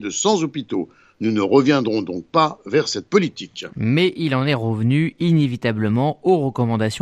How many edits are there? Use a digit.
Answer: 0